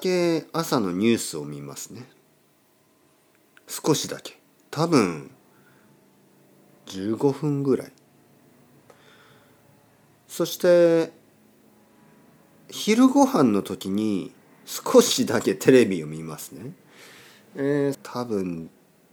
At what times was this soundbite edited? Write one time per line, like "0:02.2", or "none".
0:17.9